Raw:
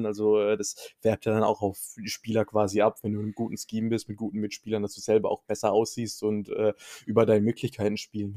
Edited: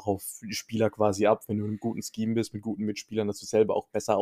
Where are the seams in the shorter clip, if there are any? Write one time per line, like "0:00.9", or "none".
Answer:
none